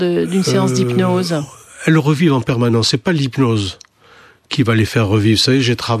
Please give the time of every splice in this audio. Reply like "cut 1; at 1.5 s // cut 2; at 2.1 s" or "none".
none